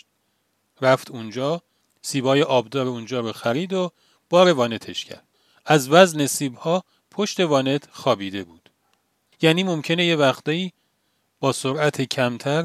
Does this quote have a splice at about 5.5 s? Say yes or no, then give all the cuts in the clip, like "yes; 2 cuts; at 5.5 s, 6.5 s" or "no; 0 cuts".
no; 1 cut; at 9.3 s